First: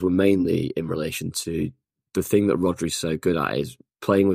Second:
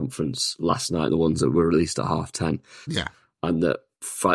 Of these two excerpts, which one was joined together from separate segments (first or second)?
second